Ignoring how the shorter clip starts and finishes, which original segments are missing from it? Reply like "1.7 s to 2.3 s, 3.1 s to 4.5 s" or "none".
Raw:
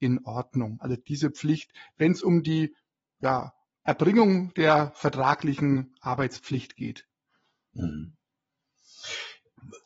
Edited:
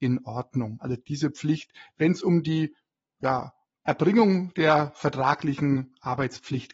none